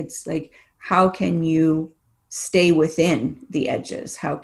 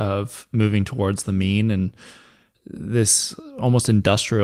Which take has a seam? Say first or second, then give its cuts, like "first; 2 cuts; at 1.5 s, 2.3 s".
second; 1 cut; at 2.5 s